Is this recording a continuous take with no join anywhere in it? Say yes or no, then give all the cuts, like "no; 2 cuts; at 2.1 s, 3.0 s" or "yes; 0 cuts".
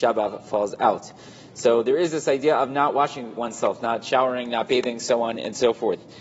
no; 1 cut; at 3.4 s